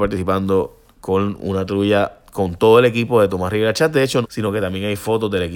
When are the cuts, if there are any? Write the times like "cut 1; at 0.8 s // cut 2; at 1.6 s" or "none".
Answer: cut 1; at 4.2 s

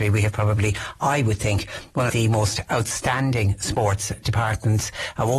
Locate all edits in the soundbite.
cut 1; at 2.1 s

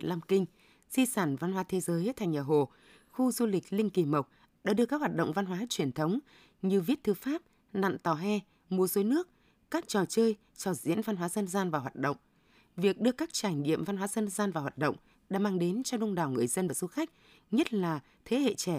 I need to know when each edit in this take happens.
none

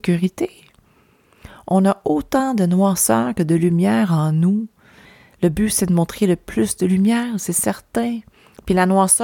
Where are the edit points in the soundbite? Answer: none

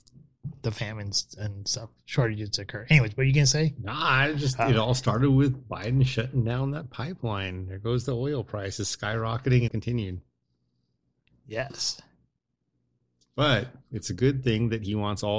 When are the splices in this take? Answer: cut 1; at 9.7 s

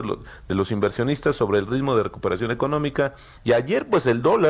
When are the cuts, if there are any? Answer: cut 1; at 3.4 s

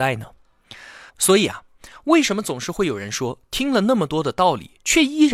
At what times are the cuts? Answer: cut 1; at 1.1 s

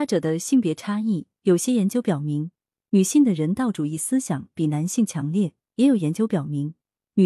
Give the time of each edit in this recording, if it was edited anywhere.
none

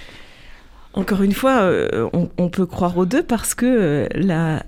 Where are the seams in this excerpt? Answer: cut 1; at 2.1 s

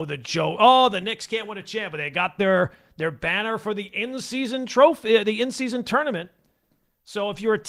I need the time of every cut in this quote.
none

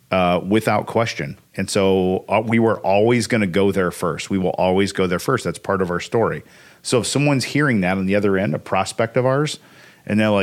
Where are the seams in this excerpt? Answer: none

